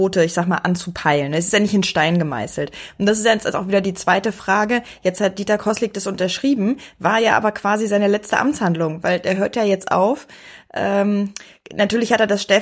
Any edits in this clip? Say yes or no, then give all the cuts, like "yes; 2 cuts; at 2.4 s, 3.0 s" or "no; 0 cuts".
no; 0 cuts